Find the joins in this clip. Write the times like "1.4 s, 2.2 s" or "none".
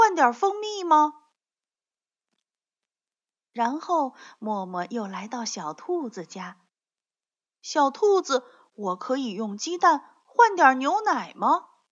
none